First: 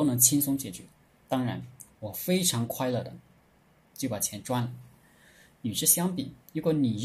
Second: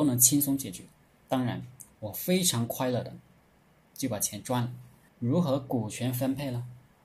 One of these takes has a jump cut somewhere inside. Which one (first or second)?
second